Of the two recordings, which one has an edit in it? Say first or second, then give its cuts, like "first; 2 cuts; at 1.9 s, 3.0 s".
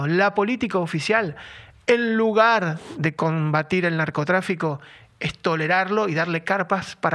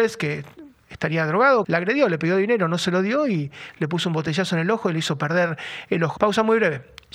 second; 2 cuts; at 1.6 s, 6.2 s